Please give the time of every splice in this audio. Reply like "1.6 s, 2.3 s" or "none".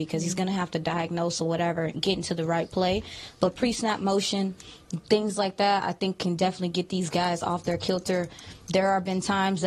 none